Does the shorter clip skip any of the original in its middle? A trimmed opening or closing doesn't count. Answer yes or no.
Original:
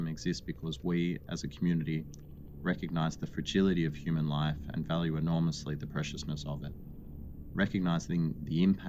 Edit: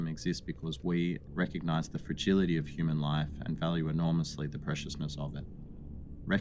yes